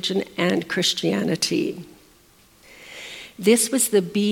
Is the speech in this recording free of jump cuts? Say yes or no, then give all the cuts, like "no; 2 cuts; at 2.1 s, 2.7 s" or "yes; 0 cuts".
yes; 0 cuts